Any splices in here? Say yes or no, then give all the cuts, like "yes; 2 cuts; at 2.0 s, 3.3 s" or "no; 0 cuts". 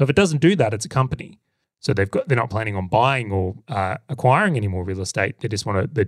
yes; 1 cut; at 1.6 s